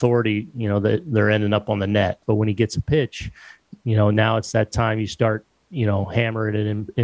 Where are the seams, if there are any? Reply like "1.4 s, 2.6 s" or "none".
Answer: 2.2 s